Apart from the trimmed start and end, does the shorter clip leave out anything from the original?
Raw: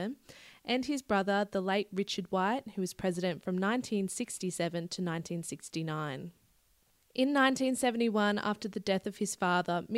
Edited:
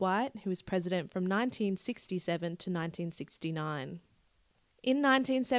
no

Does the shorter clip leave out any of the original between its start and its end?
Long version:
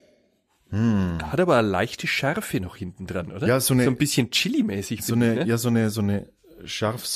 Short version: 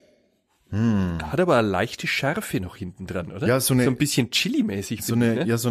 no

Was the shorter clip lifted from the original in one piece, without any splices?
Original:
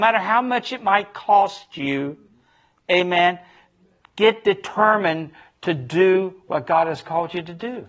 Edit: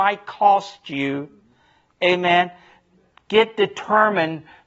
yes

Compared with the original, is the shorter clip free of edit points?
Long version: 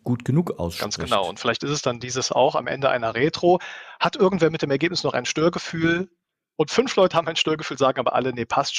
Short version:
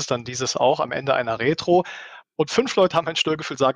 no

